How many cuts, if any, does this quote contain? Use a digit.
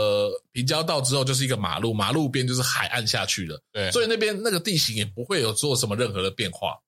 0